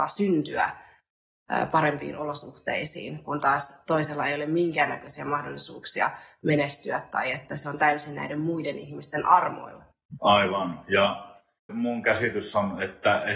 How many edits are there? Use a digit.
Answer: 2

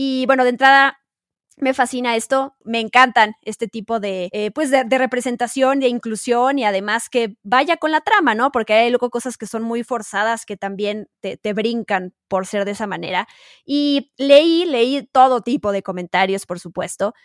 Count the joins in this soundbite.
0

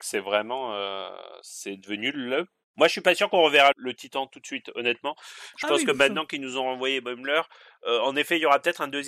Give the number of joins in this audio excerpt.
1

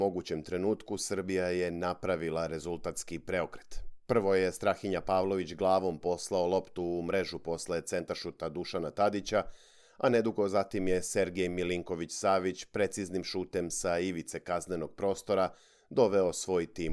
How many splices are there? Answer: 0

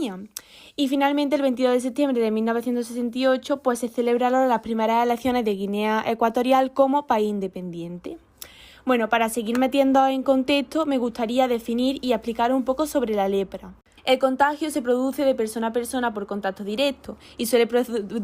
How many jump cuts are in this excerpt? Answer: 1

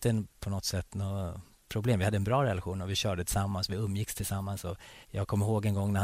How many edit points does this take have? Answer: 1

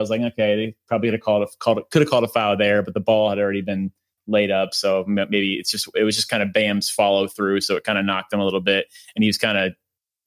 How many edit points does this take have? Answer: 0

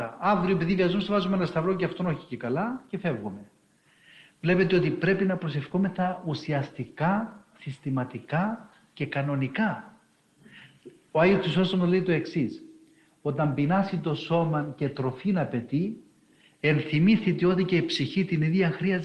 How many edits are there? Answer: 0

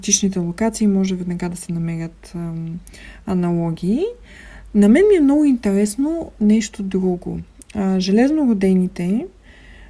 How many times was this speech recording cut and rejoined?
0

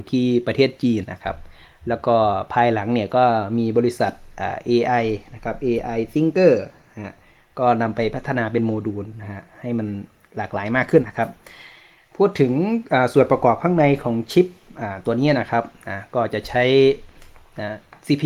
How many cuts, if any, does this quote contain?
2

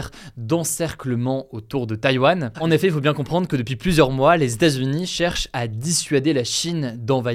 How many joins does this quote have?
1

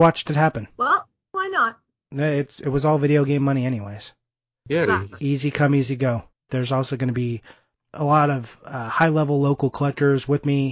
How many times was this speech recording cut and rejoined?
3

